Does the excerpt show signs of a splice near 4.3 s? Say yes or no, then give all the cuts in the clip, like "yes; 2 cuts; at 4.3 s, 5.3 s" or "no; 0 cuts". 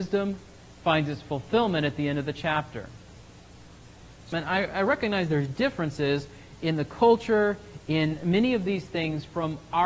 yes; 2 cuts; at 4.3 s, 7.8 s